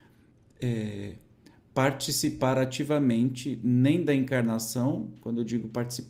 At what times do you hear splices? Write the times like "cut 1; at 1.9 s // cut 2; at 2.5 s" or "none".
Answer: none